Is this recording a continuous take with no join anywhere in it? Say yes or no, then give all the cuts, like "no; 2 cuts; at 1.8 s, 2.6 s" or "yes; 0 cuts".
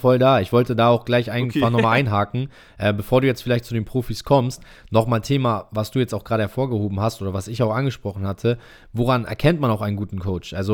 yes; 0 cuts